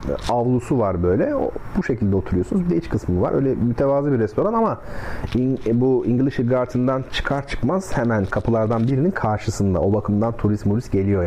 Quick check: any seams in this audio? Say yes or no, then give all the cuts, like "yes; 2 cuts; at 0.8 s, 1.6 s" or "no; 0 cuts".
no; 0 cuts